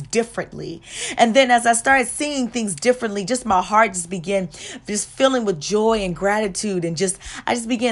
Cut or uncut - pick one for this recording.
uncut